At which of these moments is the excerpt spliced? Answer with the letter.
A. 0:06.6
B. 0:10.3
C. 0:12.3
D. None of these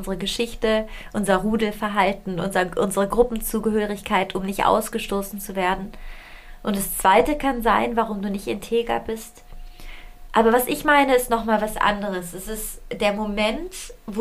B